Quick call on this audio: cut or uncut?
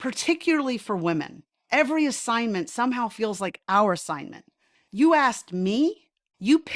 cut